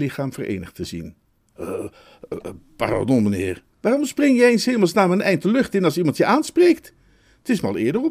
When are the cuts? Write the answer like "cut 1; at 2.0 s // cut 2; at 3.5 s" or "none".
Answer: cut 1; at 3.7 s

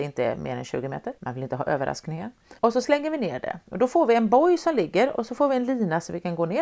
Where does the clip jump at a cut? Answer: cut 1; at 1.2 s // cut 2; at 2.6 s

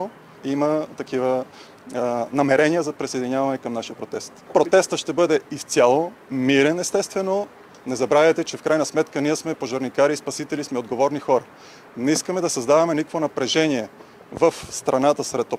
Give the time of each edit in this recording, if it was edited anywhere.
none

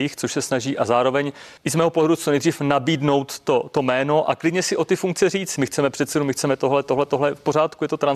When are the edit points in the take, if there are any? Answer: cut 1; at 1.6 s // cut 2; at 5.6 s

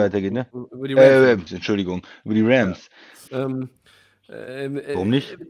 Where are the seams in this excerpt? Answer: cut 1; at 1.5 s // cut 2; at 3.3 s

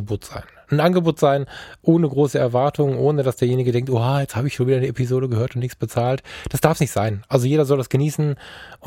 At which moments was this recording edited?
none

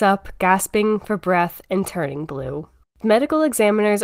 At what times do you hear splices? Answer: cut 1; at 2.9 s

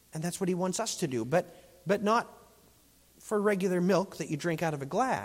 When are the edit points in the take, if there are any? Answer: none

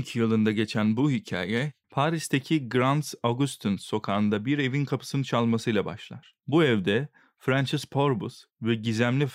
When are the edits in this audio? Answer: cut 1; at 1.8 s // cut 2; at 6.4 s

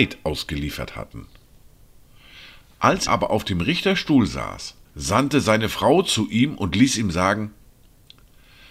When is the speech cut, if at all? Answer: cut 1; at 3.1 s // cut 2; at 4.8 s

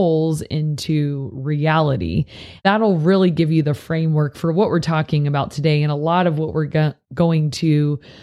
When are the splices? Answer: cut 1; at 2.6 s

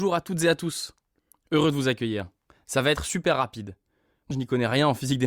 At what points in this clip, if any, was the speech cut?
cut 1; at 4.3 s

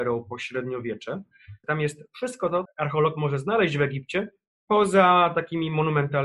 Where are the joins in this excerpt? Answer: cut 1; at 1.6 s // cut 2; at 2.7 s

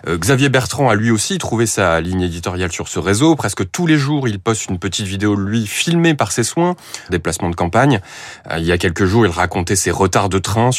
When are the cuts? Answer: cut 1; at 7.1 s

